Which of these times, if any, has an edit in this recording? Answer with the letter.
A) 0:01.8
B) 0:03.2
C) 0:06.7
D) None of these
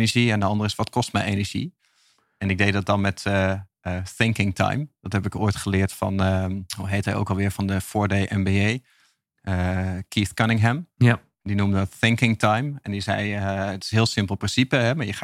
C